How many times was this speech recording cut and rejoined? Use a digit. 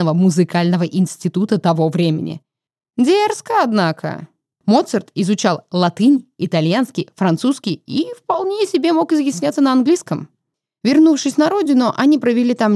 1